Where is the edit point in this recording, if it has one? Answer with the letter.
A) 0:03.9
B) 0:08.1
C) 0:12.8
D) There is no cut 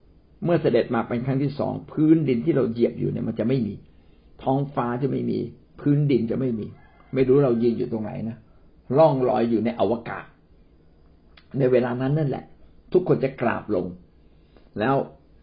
D